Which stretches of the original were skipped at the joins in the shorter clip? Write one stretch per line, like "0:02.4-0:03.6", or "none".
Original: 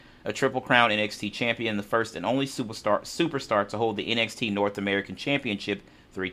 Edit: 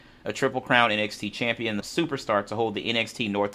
0:01.8-0:03.0